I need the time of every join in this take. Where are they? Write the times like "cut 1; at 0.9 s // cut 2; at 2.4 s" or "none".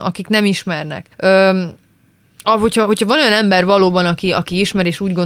cut 1; at 1.1 s